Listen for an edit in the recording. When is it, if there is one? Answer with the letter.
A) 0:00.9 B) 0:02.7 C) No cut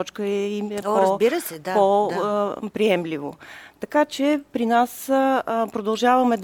C